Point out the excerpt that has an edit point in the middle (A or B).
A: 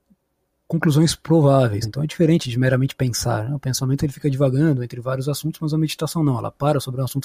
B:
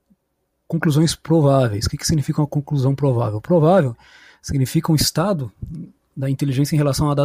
A